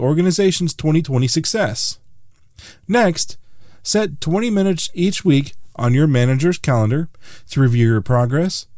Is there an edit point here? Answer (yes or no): no